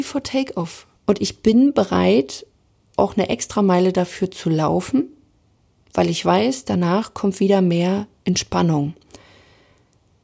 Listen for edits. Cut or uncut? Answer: cut